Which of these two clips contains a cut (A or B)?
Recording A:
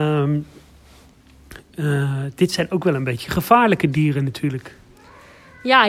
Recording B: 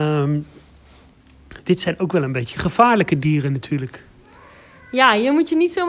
B